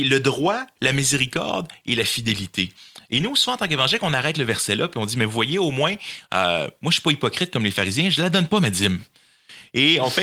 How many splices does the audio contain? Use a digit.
0